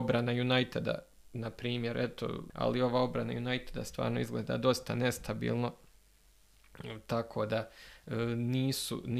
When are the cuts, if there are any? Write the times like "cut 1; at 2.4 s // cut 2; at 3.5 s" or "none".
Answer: cut 1; at 2.5 s